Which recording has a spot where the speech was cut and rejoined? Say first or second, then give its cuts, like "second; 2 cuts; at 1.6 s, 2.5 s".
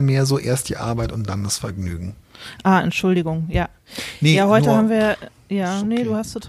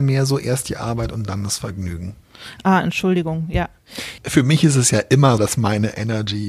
second; 2 cuts; at 4.2 s, 5.4 s